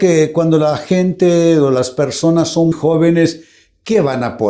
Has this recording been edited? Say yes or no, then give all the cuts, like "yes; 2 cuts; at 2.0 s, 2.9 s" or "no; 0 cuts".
yes; 1 cut; at 2.7 s